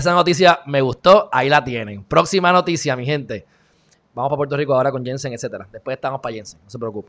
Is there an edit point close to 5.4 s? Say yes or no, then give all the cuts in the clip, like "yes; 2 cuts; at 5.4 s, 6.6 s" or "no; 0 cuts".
no; 1 cut; at 4.0 s